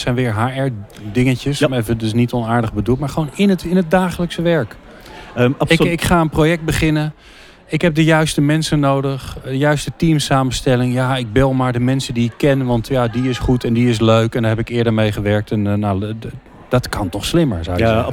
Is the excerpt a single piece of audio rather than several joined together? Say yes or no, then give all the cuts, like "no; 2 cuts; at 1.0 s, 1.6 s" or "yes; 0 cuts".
yes; 0 cuts